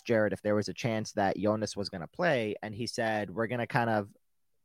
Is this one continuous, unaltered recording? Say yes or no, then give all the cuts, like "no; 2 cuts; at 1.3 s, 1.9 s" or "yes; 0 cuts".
yes; 0 cuts